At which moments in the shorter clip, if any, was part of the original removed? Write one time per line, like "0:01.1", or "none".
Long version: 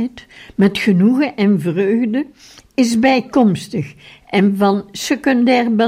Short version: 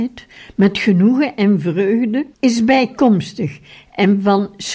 0:02.3